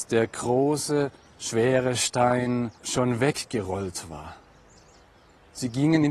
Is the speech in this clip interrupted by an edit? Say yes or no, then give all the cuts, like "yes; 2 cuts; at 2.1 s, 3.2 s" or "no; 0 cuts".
yes; 1 cut; at 2.8 s